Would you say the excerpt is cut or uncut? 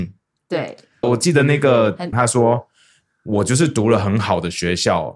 cut